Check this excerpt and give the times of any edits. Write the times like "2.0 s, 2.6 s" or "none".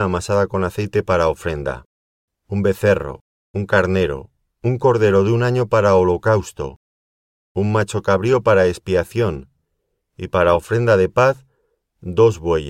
2.3 s